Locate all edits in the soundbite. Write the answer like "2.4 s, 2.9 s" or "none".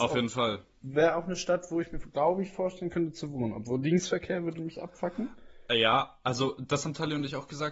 none